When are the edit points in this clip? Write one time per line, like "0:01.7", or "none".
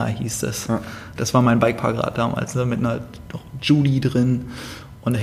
0:01.2

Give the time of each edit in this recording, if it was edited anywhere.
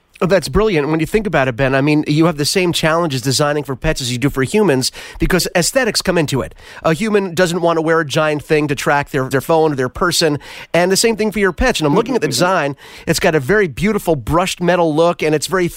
0:09.3
0:11.7

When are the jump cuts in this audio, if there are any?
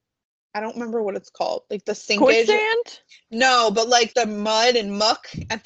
0:04.1

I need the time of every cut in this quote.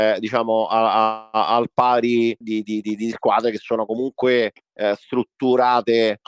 0:02.4

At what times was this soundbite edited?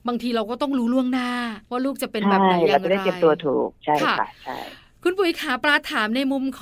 0:01.7

